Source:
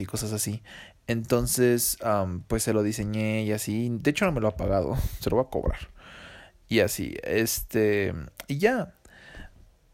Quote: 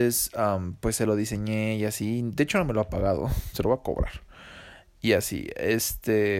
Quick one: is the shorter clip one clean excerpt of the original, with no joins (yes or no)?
yes